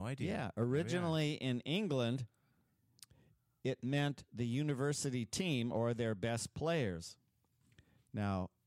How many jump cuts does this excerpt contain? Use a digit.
0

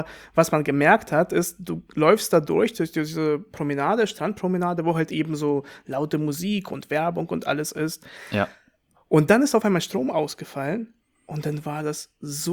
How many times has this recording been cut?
0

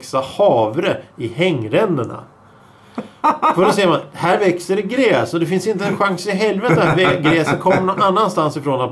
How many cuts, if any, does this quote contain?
0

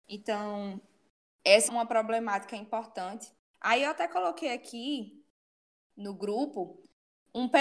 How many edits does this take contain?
2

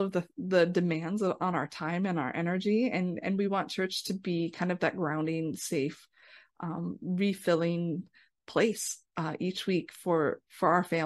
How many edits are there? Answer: 0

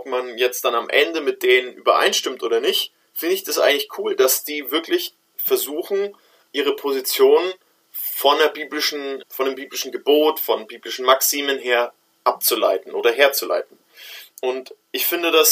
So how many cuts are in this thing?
2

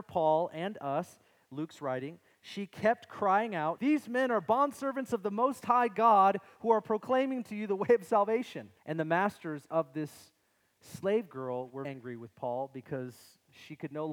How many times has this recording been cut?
3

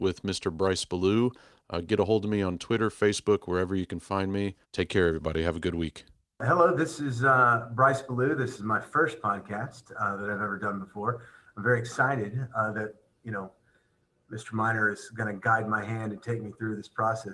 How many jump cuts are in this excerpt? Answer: 1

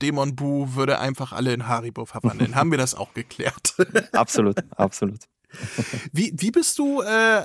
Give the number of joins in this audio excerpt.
0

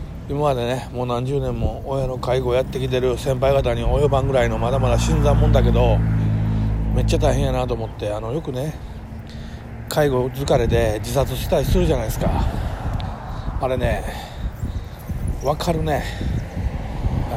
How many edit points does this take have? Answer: 0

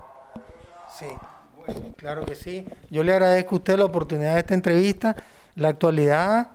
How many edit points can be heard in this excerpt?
1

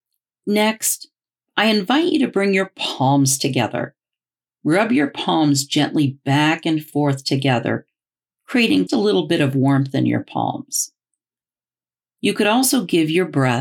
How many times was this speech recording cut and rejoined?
1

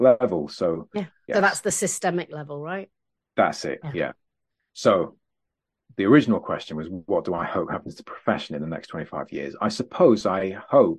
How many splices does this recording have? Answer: 2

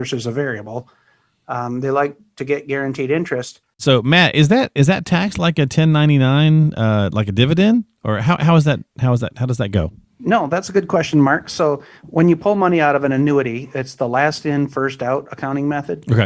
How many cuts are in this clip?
1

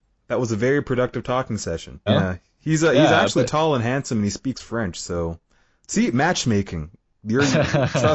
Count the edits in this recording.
2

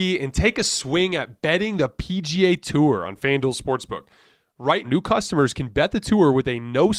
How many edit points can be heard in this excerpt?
1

